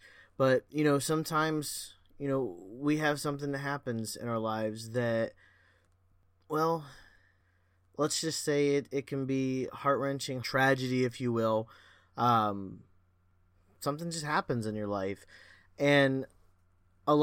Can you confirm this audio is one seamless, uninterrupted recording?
no; 1 cut; at 10.4 s

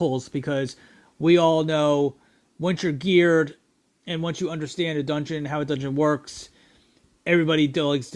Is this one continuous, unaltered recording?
yes; 0 cuts

